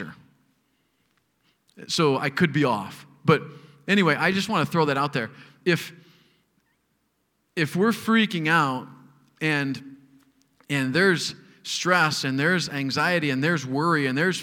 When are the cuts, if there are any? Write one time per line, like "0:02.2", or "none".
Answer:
none